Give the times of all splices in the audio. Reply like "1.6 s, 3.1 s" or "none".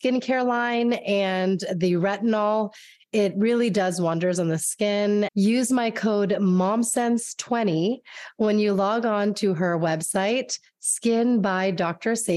5.3 s